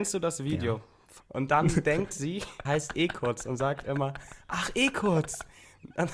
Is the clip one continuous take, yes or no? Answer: no